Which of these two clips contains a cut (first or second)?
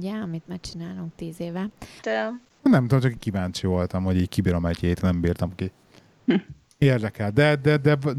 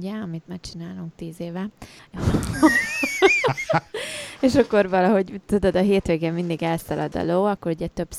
first